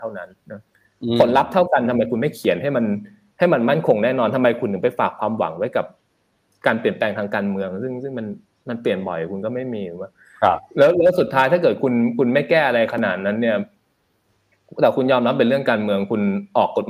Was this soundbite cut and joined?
no; 0 cuts

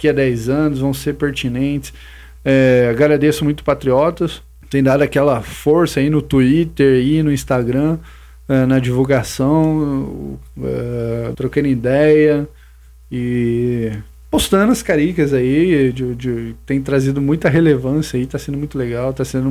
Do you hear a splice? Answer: yes; 2 cuts; at 2.4 s, 11.3 s

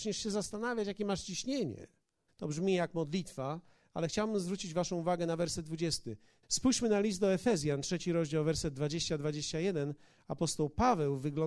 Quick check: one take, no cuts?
no; 2 cuts; at 2.3 s, 6.4 s

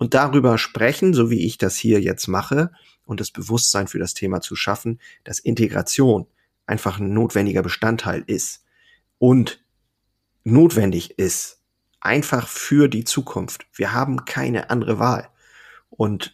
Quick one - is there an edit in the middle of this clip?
no; 0 cuts

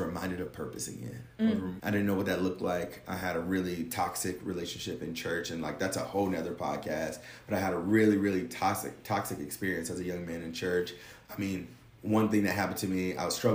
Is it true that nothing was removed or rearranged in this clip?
no; 1 cut; at 1.8 s

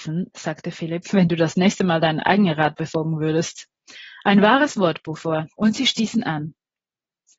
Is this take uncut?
no; 2 cuts; at 1.0 s, 5.5 s

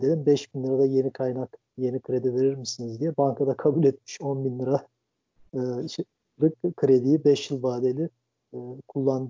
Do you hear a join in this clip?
no; 0 cuts

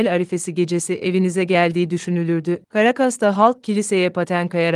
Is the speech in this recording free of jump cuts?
no; 1 cut; at 2.6 s

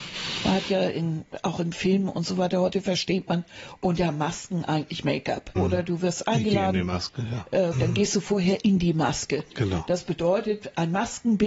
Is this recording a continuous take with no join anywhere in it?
no; 2 cuts; at 5.6 s, 7.7 s

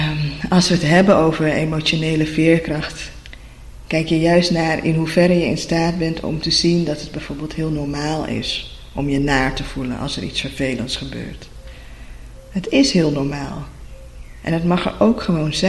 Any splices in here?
no; 0 cuts

